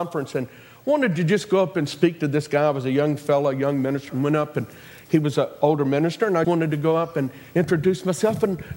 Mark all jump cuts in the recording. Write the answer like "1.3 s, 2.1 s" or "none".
4.1 s, 6.4 s